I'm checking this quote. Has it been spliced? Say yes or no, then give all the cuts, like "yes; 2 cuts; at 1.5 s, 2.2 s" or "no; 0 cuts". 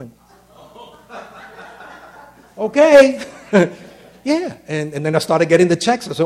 no; 0 cuts